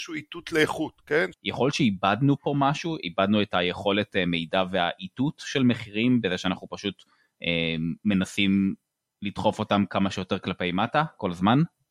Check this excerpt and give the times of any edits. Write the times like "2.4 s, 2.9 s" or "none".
1.3 s